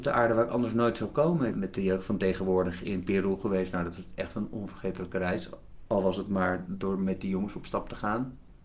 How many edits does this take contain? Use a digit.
1